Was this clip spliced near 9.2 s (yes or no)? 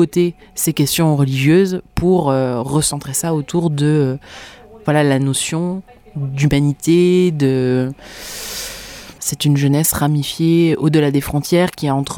yes